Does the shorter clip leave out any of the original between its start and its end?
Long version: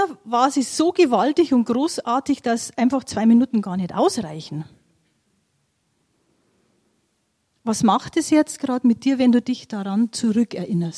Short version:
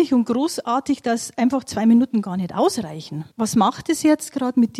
yes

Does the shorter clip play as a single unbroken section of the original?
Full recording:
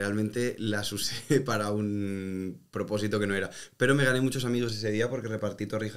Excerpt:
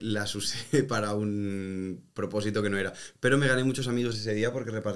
yes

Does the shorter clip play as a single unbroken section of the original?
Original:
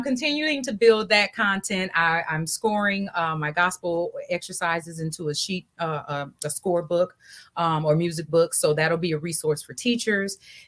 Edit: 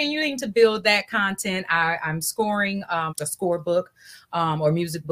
no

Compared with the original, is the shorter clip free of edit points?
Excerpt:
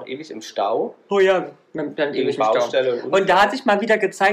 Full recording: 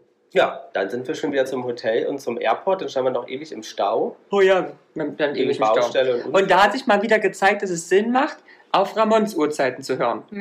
yes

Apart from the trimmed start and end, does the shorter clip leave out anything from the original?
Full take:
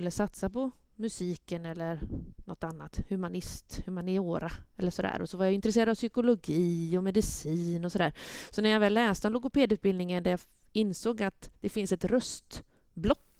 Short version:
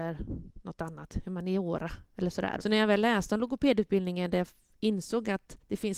yes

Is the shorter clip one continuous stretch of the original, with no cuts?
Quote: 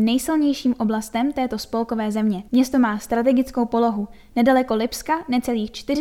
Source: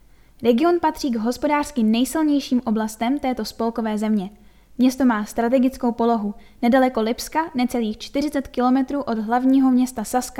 no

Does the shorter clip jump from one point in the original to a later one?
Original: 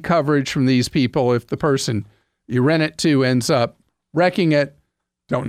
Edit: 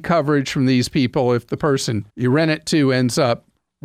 yes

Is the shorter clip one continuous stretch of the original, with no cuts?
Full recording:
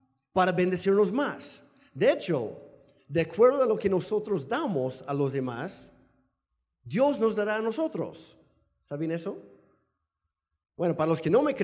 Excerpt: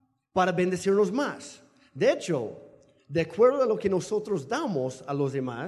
yes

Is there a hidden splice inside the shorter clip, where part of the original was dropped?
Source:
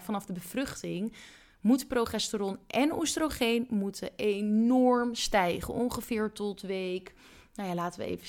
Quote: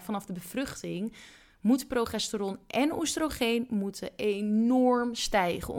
no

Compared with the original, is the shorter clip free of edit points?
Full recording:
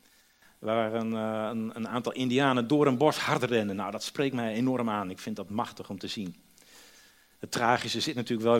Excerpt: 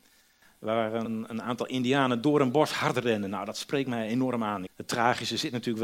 no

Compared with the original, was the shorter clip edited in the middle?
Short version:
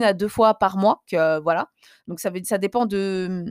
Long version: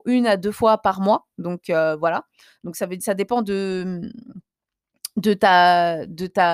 yes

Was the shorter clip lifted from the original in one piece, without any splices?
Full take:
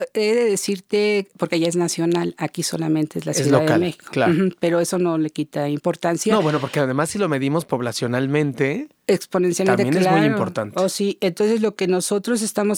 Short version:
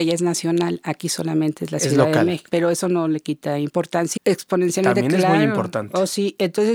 no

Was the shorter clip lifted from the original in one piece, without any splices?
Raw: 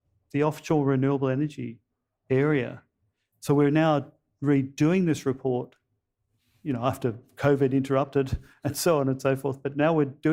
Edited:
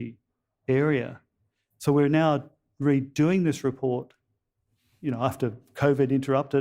yes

